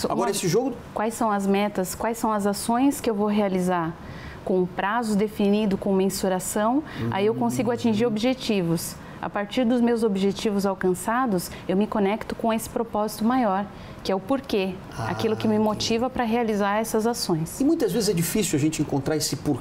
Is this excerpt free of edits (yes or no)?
no